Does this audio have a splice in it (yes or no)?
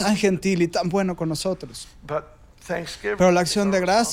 no